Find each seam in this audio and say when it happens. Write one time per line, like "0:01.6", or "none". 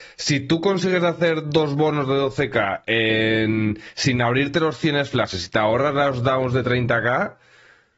none